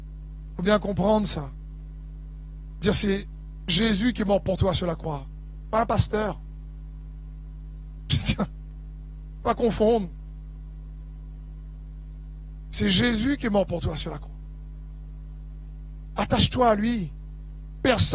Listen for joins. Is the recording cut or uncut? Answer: uncut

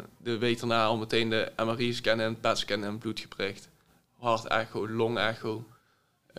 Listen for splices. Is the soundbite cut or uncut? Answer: uncut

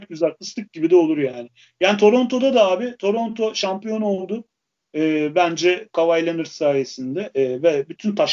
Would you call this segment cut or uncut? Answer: uncut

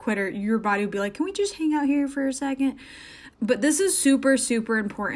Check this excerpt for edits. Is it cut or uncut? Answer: cut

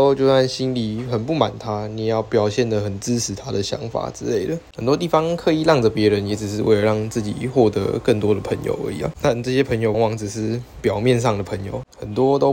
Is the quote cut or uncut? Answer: cut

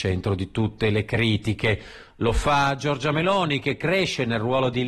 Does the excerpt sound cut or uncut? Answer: uncut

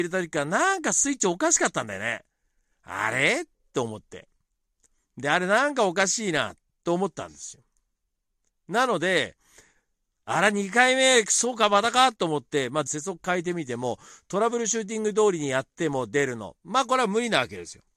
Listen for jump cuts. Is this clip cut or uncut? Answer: cut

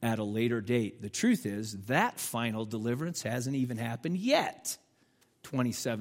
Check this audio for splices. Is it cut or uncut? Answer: uncut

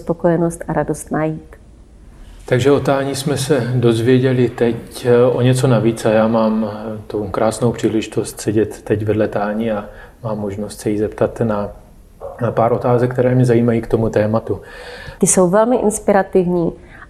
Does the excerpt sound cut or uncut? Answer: cut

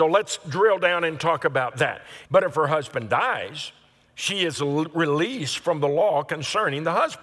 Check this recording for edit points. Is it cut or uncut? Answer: cut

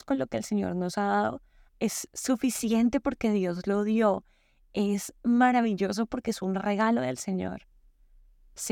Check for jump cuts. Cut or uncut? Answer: cut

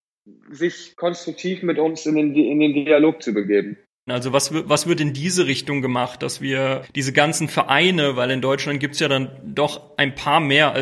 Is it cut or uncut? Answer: cut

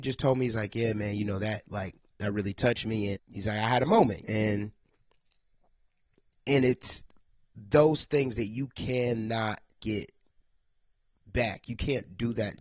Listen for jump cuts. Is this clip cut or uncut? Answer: cut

